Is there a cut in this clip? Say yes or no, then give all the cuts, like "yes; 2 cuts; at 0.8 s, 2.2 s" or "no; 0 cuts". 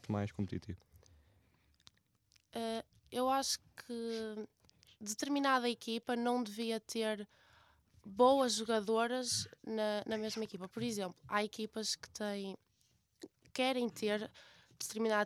no; 0 cuts